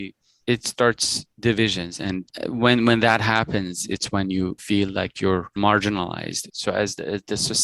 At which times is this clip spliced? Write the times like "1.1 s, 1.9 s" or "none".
2.0 s, 6.5 s